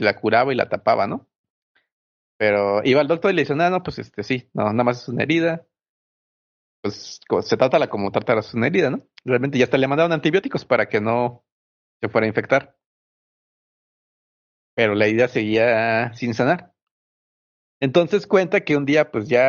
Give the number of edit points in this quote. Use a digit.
0